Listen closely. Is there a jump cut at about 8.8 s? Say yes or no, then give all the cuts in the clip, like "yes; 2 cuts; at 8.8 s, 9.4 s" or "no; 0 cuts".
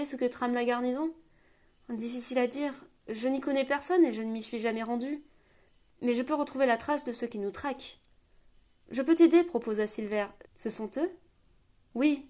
no; 1 cut; at 10.4 s